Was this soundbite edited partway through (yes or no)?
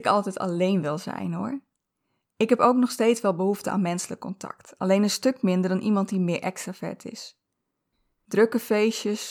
no